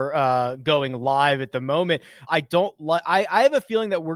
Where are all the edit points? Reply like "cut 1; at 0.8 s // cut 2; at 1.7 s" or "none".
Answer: cut 1; at 2.3 s